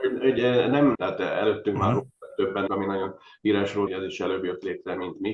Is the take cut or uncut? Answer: cut